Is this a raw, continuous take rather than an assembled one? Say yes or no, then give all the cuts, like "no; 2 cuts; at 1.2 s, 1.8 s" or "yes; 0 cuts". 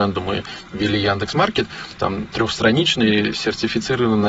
no; 1 cut; at 2.0 s